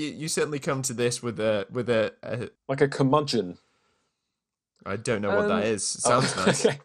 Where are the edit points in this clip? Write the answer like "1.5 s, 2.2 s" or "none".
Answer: 2.6 s